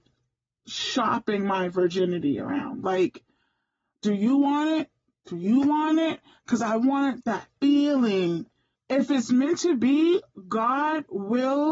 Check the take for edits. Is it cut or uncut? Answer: cut